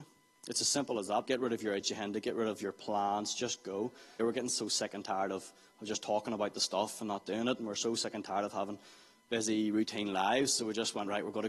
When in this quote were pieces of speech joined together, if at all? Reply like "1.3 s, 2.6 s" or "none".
1.2 s, 4.2 s